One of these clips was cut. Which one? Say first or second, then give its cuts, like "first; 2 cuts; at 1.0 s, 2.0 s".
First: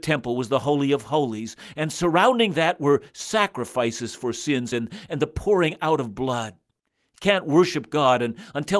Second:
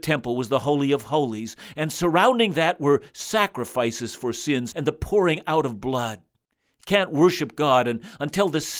second; 1 cut; at 4.7 s